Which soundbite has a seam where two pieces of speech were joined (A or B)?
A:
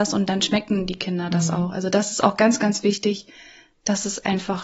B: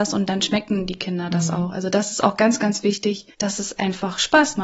B